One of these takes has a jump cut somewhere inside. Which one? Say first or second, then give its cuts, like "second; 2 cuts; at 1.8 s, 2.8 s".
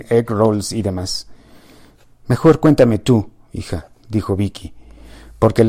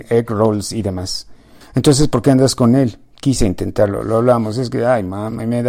second; 1 cut; at 1.6 s